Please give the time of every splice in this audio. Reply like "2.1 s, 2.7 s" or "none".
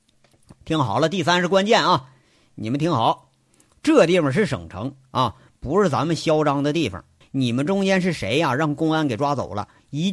7.2 s